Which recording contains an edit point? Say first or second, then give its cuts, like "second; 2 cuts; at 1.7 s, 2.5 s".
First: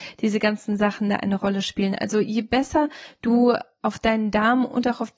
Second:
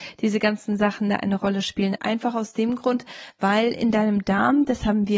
second; 1 cut; at 2.0 s